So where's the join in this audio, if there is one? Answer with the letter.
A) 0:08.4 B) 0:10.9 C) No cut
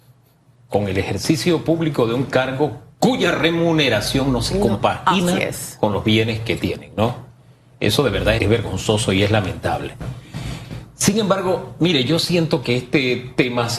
A